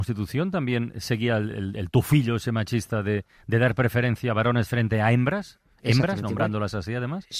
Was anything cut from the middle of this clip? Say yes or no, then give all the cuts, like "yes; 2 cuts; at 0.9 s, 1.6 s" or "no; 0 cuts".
no; 0 cuts